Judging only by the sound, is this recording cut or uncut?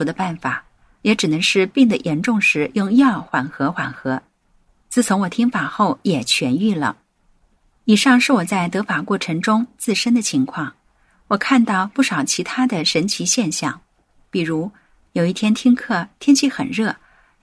uncut